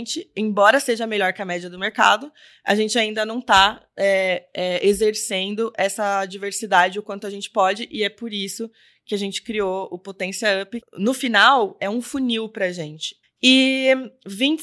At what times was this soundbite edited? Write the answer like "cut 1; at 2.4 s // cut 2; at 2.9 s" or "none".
cut 1; at 10.8 s // cut 2; at 13.2 s